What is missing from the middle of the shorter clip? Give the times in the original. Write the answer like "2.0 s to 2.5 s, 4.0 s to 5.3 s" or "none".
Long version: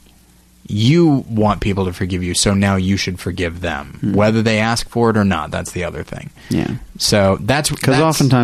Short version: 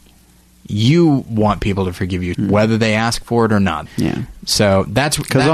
2.3 s to 4.0 s, 5.5 s to 6.4 s

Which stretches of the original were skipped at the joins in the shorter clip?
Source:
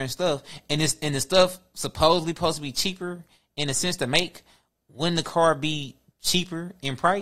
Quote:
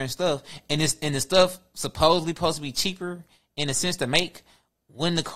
none

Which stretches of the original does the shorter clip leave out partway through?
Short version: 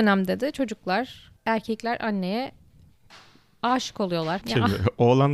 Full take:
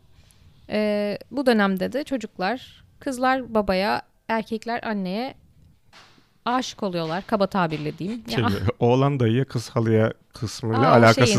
2.9 s to 4.2 s, 7.2 s to 8.2 s

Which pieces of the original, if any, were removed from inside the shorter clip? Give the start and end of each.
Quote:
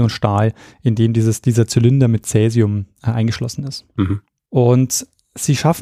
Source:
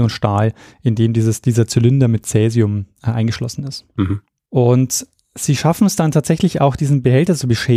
none

